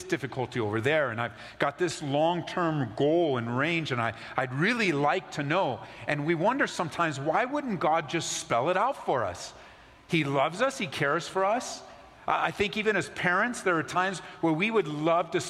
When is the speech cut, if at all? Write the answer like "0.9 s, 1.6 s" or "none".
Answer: none